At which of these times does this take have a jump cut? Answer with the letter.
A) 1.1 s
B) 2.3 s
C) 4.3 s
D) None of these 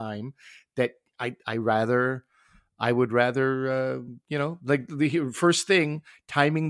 D